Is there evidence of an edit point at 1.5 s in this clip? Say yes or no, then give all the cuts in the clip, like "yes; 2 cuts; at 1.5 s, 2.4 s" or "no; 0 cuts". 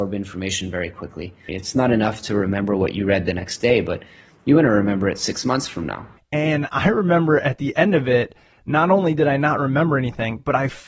yes; 2 cuts; at 1.5 s, 6.2 s